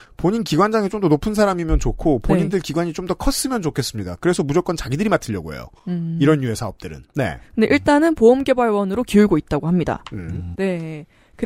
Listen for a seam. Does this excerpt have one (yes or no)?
yes